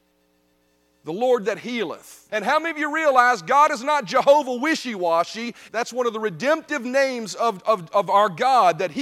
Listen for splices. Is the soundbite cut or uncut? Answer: cut